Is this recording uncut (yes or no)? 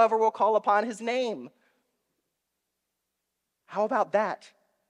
yes